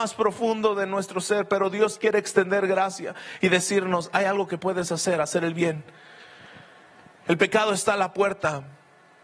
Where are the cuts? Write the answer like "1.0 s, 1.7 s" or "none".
none